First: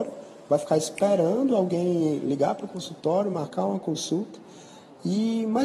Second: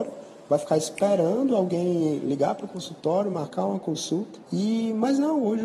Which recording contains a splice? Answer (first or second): second